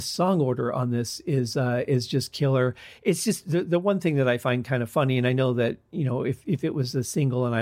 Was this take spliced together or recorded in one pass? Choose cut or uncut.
uncut